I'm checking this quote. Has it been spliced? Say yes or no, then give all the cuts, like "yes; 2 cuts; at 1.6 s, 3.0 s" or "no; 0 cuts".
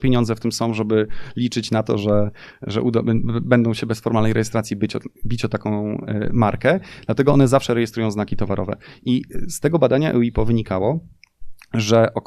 no; 0 cuts